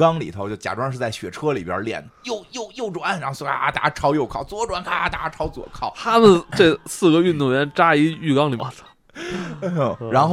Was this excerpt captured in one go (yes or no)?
no